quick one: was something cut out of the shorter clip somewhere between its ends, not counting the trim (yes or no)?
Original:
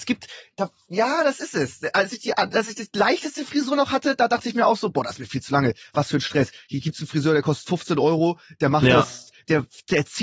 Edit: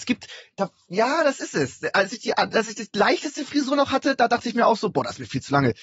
no